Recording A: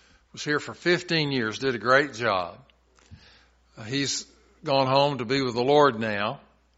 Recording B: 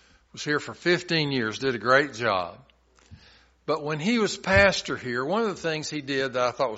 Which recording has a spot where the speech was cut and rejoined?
B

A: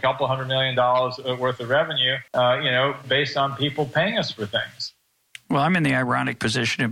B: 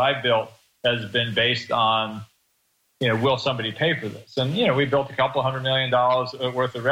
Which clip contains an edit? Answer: A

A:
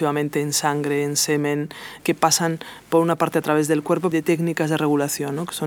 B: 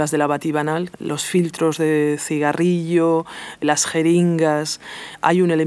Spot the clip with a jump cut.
A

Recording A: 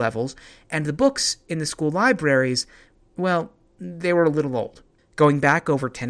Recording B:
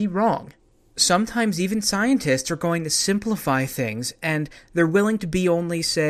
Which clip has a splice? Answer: A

